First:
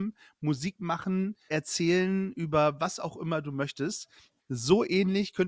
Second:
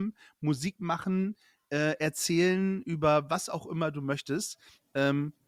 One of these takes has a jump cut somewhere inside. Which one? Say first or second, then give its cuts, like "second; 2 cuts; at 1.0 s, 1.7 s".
first; 2 cuts; at 1.5 s, 4.4 s